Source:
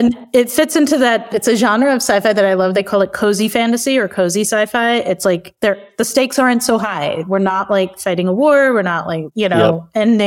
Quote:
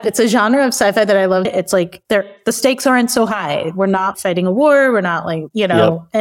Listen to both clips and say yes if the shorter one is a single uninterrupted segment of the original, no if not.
no